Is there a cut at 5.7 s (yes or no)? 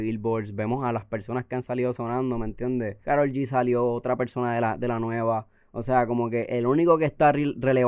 no